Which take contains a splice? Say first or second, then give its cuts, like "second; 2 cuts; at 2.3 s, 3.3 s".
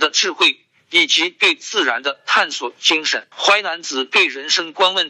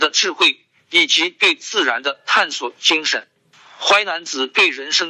first; 1 cut; at 3.3 s